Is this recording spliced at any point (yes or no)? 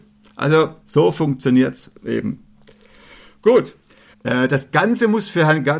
yes